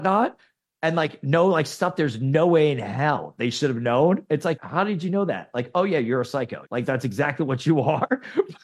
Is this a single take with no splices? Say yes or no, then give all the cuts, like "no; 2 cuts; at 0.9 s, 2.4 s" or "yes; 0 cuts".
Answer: no; 2 cuts; at 4.6 s, 6.6 s